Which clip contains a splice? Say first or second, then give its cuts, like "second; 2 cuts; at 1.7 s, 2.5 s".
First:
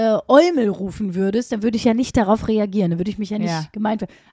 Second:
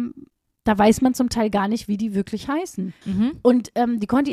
second; 1 cut; at 3.0 s